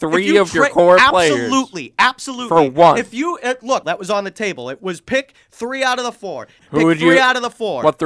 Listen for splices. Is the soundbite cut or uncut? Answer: cut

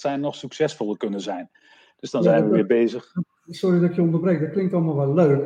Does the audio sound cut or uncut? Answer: uncut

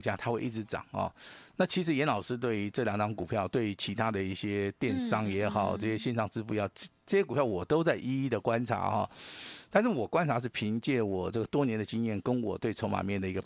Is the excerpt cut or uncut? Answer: uncut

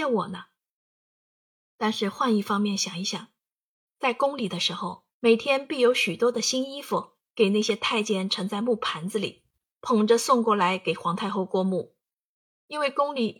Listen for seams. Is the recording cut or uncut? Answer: cut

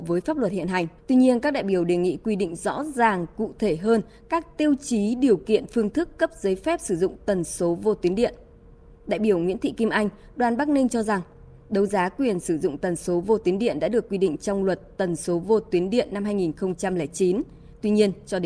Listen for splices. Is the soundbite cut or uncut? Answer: cut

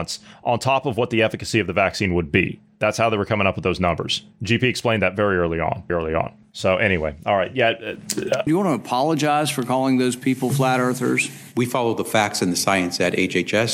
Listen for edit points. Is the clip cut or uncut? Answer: cut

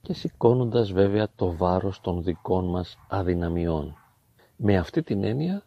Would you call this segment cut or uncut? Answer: uncut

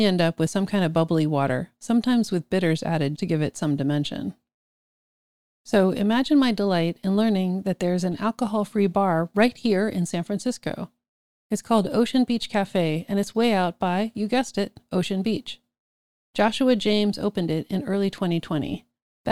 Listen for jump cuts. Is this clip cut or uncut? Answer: cut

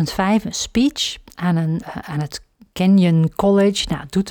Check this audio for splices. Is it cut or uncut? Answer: cut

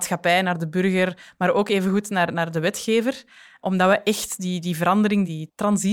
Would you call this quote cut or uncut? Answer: uncut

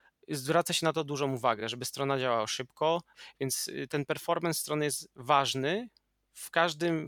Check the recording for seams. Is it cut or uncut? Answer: uncut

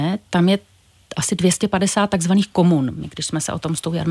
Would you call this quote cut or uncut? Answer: uncut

